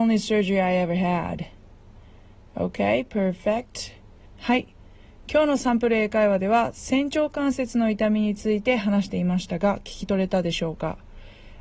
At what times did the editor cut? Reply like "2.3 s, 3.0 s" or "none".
4.2 s